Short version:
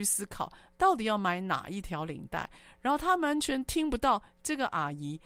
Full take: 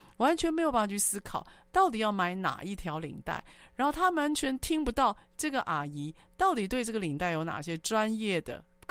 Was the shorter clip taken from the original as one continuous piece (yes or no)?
yes